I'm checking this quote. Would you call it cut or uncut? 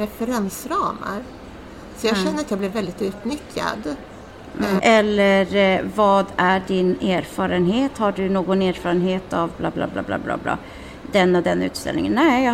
cut